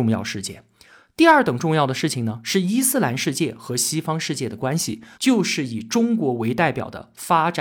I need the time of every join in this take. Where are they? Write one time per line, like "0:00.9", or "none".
0:05.1

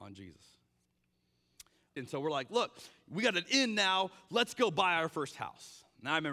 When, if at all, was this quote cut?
0:02.0

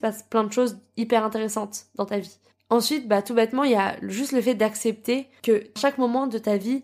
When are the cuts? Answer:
none

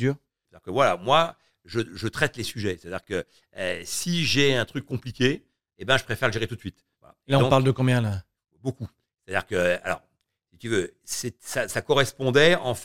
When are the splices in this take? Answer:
0:07.0

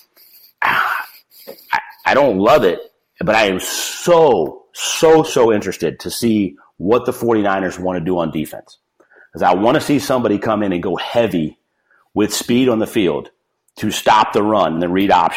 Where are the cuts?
0:05.3

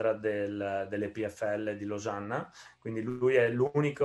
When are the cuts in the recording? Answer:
none

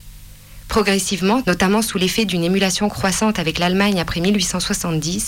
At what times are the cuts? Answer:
0:01.4

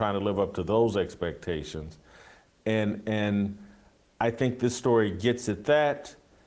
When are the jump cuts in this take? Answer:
none

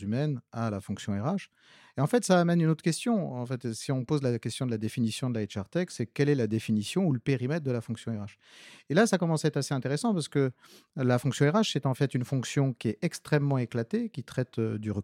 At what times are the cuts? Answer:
none

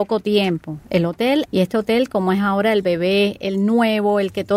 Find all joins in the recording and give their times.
0:01.5
0:03.4

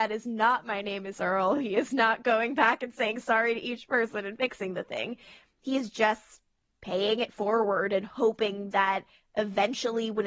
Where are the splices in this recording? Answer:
none

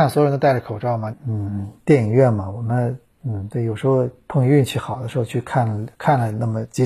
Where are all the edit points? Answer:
0:01.1

